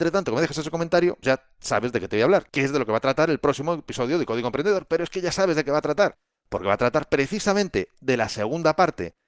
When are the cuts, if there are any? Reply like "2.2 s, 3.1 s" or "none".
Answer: 1.2 s